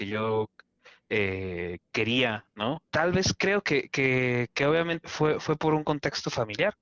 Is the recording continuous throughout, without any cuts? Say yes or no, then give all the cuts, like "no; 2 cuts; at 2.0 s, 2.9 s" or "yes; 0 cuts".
no; 2 cuts; at 2.9 s, 5.0 s